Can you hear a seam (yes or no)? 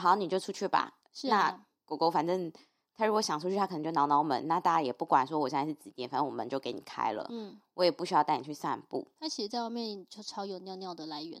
yes